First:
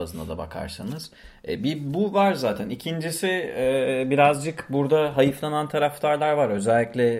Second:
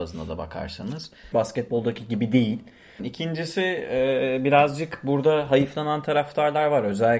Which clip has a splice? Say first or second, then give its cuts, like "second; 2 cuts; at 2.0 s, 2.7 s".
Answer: second; 2 cuts; at 1.3 s, 3.0 s